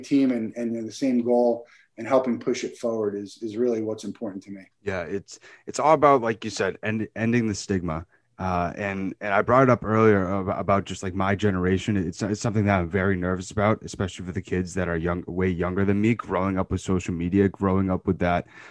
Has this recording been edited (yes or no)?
yes